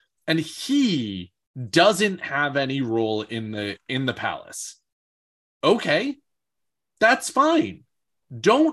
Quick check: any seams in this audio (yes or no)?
no